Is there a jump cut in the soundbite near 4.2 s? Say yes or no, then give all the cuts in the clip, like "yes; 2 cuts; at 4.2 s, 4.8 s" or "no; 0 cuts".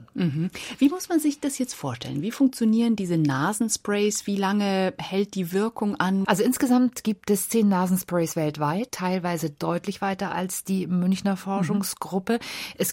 no; 2 cuts; at 6.2 s, 8.9 s